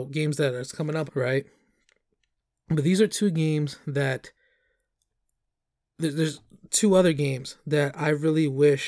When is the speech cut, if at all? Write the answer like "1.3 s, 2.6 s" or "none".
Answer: 1.1 s